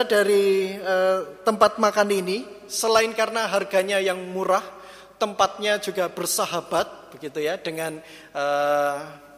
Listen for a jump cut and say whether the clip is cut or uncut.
uncut